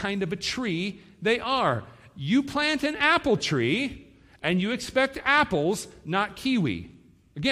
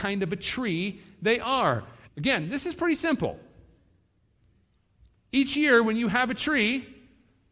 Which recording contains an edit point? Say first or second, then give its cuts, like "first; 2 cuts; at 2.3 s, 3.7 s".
second; 1 cut; at 2.1 s